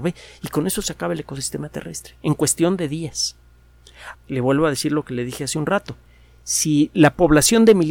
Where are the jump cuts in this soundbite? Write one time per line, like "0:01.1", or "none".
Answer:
0:04.1